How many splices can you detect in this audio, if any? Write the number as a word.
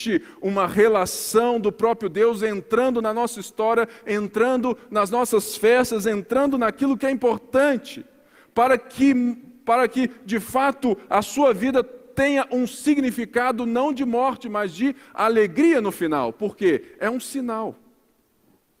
zero